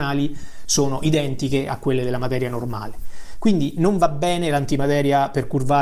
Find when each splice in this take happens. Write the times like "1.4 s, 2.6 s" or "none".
none